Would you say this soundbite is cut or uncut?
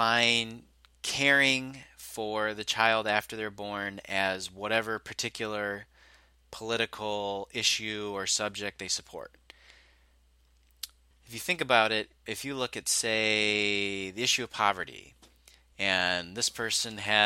cut